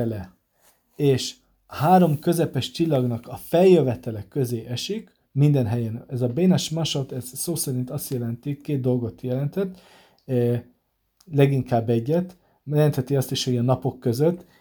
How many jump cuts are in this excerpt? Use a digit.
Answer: 1